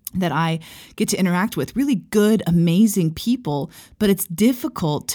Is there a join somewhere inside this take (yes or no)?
no